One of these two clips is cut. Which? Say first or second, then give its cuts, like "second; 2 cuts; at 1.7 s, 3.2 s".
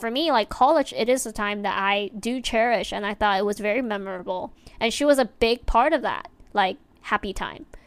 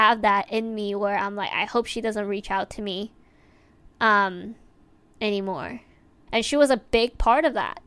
second; 1 cut; at 6.3 s